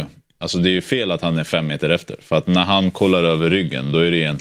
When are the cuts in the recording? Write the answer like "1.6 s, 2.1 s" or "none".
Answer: none